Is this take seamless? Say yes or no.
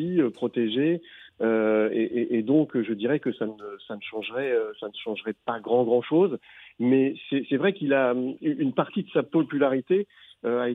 yes